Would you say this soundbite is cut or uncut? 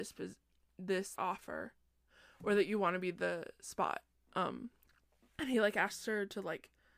cut